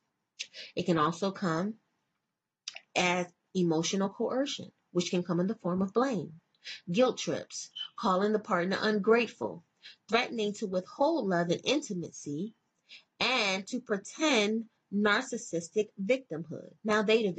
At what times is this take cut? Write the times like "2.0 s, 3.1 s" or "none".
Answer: none